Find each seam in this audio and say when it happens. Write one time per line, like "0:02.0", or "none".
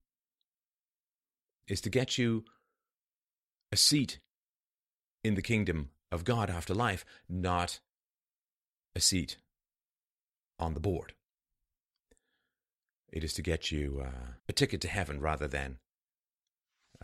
0:14.4